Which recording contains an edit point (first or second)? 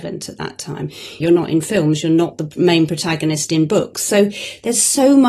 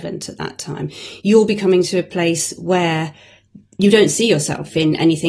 first